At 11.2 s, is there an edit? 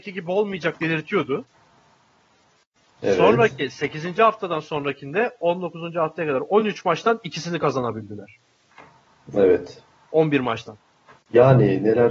yes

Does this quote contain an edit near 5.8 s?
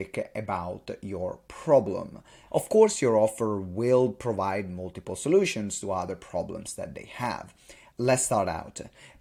no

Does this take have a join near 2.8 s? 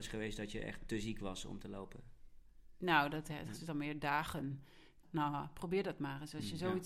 no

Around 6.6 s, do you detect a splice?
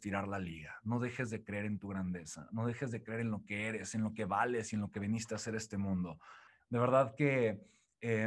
yes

